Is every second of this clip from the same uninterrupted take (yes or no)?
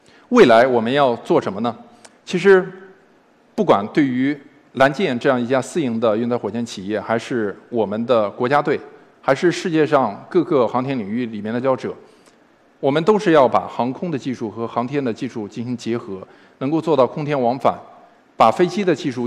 no